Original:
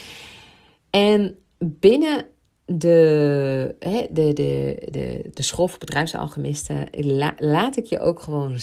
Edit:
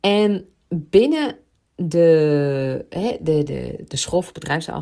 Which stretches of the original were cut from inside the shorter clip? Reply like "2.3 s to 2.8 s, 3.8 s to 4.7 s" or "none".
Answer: 4.3 s to 4.9 s